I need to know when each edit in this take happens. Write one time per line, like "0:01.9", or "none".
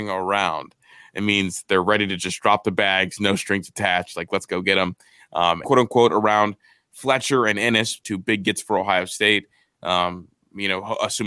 0:05.6
0:08.0